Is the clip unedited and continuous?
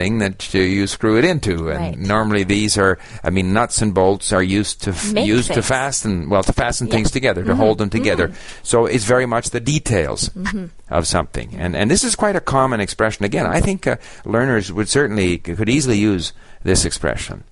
yes; 0 cuts

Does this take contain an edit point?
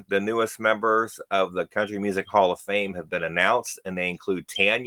no; 0 cuts

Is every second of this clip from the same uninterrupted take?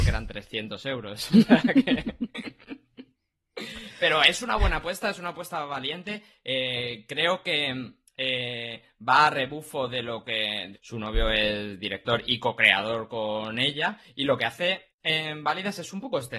no; 1 cut; at 10.7 s

